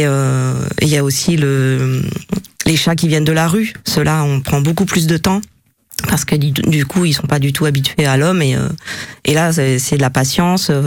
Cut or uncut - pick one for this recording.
uncut